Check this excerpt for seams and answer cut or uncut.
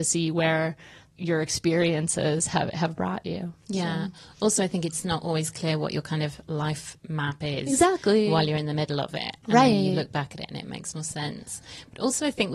uncut